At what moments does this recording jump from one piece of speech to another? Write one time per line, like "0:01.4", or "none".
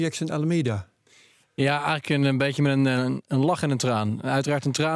none